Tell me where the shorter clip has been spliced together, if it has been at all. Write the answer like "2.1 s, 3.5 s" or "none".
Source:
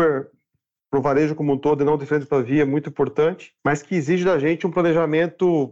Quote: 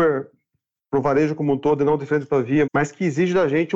2.7 s